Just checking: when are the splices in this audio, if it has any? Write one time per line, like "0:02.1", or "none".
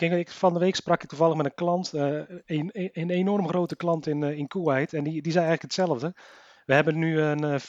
none

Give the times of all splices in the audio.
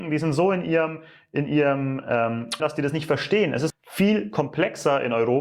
0:02.6
0:03.7

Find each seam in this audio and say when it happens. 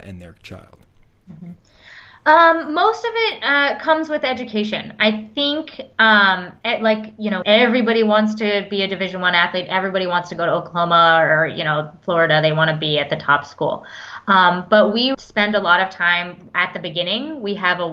0:07.4
0:15.1

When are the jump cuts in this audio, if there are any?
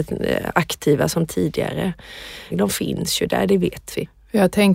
0:02.5

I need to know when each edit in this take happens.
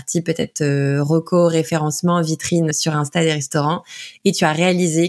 0:02.7

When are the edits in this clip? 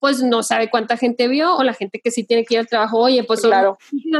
0:01.6

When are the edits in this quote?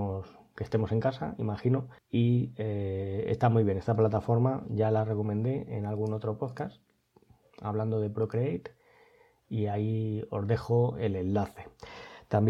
0:02.0

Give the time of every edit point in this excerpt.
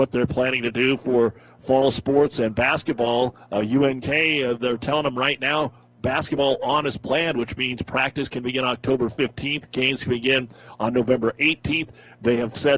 none

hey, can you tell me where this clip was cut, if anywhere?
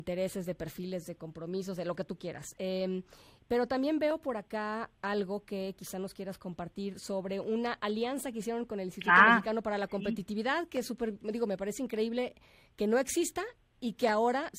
none

